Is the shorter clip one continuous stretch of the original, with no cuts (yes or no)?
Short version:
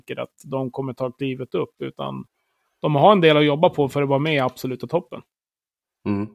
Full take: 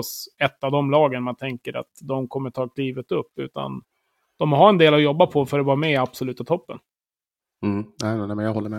yes